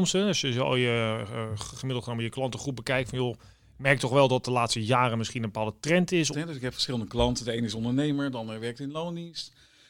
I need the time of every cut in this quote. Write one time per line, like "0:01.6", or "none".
0:06.3